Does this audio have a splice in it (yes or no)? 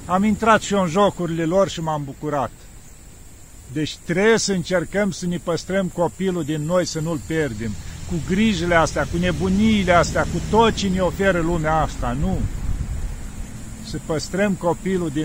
no